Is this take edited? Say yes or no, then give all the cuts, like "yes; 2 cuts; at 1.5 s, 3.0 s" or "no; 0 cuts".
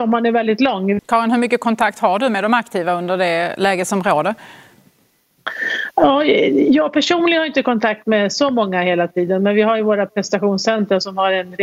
yes; 1 cut; at 1.0 s